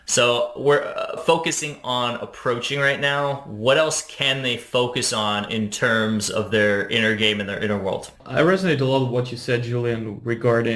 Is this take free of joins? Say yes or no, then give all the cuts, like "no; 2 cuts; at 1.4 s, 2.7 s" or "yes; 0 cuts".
no; 2 cuts; at 1.2 s, 8.2 s